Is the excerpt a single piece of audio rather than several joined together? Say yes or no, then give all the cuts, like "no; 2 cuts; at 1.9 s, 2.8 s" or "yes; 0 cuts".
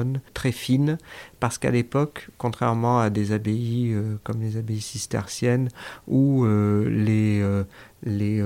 yes; 0 cuts